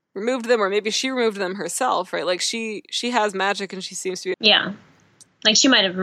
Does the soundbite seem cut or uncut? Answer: cut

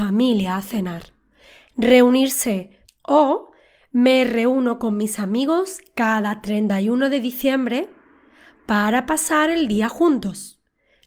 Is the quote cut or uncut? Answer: cut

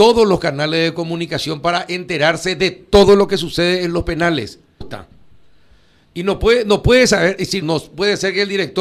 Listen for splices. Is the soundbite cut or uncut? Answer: cut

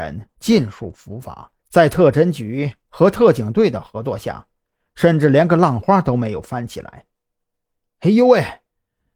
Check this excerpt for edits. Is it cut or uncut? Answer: cut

